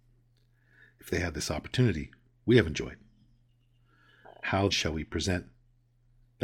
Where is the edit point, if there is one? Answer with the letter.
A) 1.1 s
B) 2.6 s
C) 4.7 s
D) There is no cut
C